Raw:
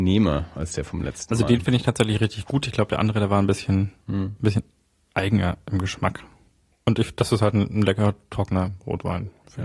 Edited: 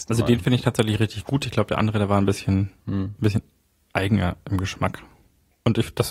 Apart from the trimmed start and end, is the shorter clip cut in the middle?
no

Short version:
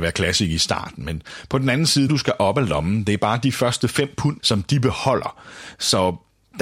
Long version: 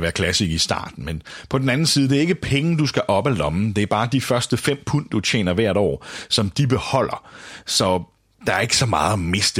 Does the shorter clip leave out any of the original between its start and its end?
yes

